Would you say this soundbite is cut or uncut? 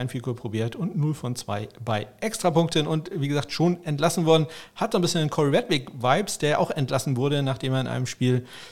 uncut